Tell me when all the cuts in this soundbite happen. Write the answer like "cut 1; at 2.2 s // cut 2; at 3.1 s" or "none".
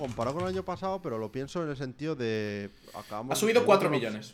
none